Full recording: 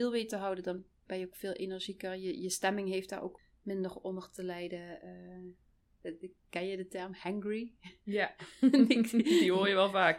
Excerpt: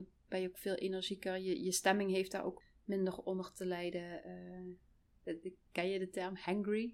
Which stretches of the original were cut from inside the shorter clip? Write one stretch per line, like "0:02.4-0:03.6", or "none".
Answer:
none